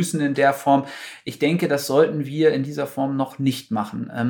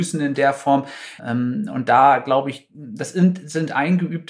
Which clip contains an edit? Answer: second; 1 cut; at 1.2 s

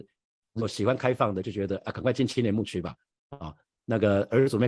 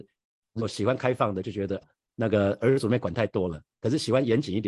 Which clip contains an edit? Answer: second; 1 cut; at 1.8 s

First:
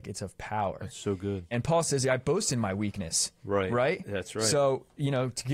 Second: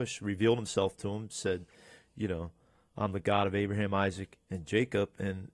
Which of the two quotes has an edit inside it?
first; 1 cut; at 1.5 s

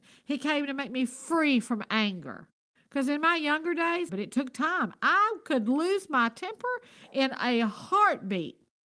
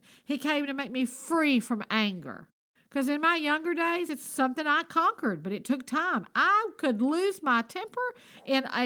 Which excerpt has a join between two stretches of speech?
first; 1 cut; at 4.1 s

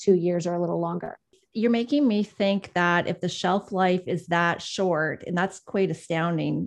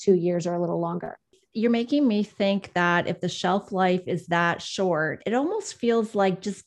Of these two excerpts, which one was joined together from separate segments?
second; 1 cut; at 5.2 s

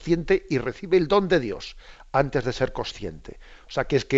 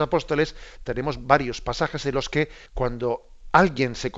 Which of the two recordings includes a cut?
second; 1 cut; at 2.7 s

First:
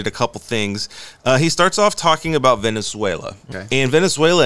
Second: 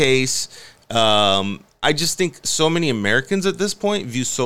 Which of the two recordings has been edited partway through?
first; 1 cut; at 3.5 s

